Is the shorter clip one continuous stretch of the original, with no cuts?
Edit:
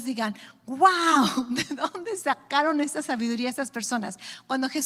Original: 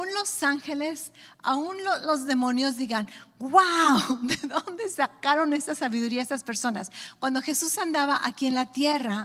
yes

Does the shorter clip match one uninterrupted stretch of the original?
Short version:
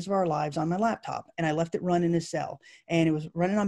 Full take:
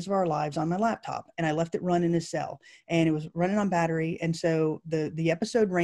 yes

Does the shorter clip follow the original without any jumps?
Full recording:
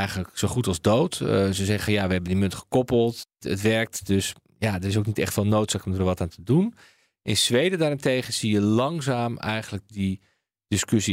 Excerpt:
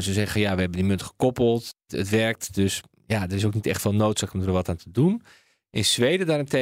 yes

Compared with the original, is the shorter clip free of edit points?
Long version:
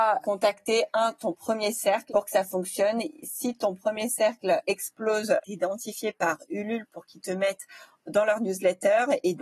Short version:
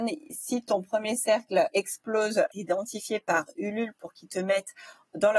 yes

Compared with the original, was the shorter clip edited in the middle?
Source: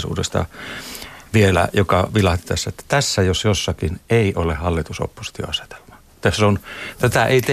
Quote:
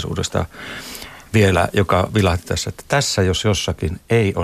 no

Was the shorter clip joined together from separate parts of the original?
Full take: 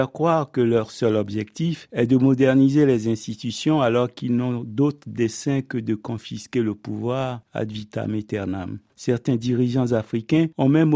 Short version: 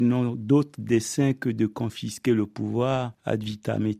no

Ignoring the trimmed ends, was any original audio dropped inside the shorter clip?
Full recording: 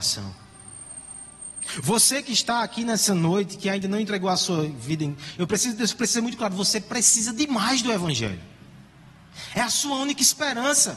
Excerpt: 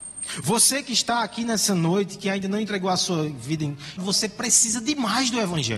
yes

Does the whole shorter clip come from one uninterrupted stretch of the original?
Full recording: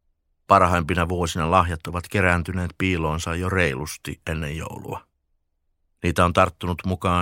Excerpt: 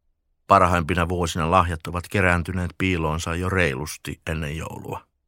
yes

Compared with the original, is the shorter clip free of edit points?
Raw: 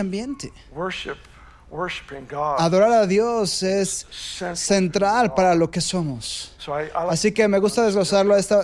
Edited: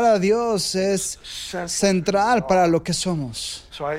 yes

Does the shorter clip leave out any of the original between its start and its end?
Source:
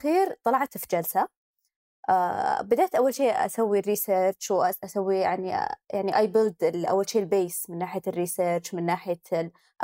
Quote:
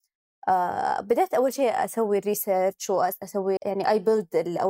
yes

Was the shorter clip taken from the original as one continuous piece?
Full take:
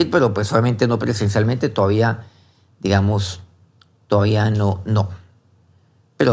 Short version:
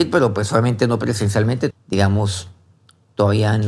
no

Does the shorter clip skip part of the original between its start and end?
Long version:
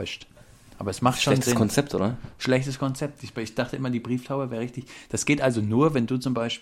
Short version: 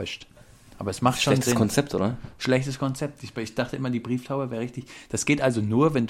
no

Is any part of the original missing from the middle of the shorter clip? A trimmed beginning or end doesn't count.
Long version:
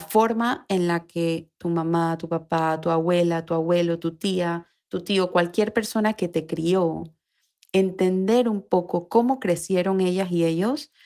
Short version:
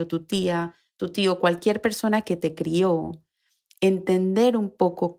no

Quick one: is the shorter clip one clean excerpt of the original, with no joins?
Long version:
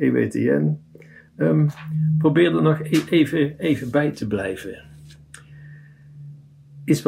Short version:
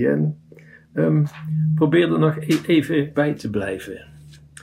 no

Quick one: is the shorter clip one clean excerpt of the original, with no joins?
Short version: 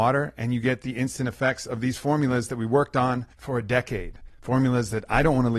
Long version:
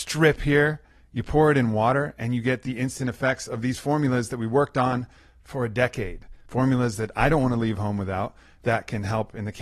no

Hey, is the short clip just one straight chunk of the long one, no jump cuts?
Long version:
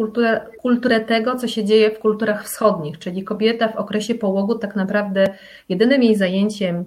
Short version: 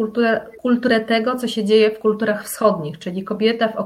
yes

